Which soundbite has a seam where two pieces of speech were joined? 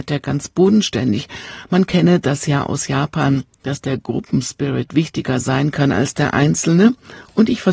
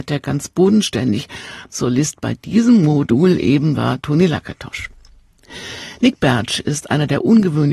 second; 1 cut; at 1.7 s

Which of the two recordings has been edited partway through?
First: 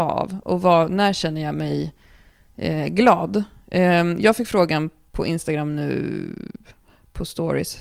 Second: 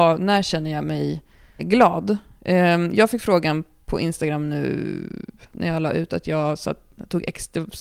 second; 2 cuts; at 1.6 s, 5.5 s

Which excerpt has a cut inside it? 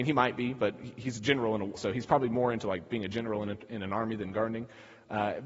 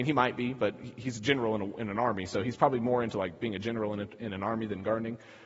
first; 1 cut; at 1.8 s

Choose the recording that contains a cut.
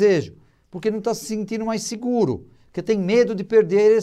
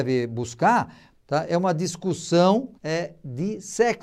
second; 2 cuts; at 1.1 s, 2.7 s

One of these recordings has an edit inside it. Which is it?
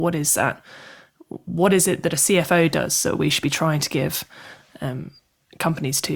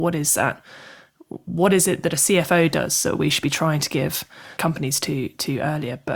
second; 1 cut; at 4.6 s

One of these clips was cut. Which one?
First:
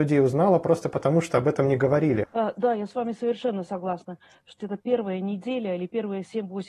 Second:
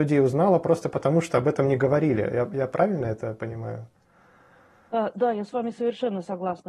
first; 2 cuts; at 2.2 s, 4.6 s

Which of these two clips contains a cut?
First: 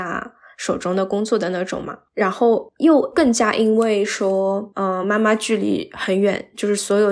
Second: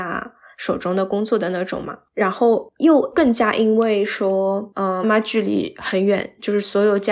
second; 1 cut; at 5.0 s

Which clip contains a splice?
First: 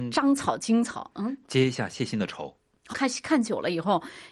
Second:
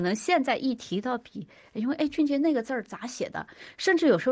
first; 1 cut; at 2.9 s

